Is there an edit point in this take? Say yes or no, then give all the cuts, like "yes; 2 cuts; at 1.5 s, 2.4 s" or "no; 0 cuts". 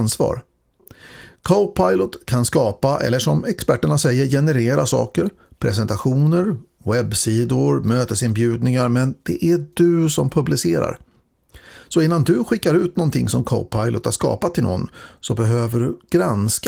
no; 0 cuts